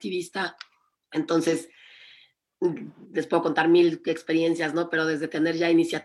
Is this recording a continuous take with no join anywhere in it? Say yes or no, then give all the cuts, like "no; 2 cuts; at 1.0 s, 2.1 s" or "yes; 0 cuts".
no; 1 cut; at 1.0 s